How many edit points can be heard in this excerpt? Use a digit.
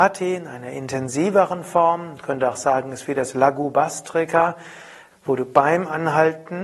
1